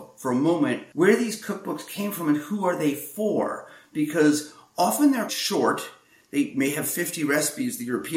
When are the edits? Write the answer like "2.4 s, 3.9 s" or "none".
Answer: 5.3 s